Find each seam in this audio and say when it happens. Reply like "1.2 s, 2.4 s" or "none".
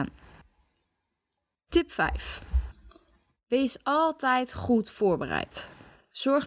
none